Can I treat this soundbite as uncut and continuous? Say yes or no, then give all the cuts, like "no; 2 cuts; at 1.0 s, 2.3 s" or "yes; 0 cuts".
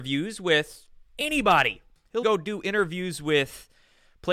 no; 2 cuts; at 1.1 s, 2.2 s